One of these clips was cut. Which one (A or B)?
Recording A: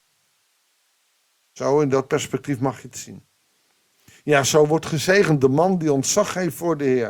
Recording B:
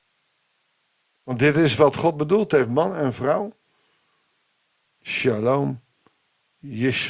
B